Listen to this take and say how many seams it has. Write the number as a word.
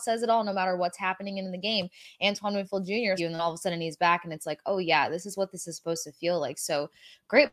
one